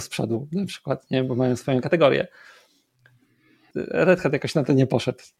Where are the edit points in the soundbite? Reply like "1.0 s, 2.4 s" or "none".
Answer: 3.7 s